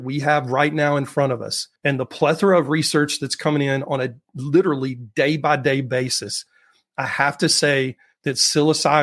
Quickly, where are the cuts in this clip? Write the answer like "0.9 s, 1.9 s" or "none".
1.8 s